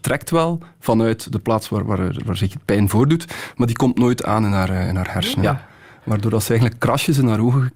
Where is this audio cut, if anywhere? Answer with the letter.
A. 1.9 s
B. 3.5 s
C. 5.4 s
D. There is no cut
C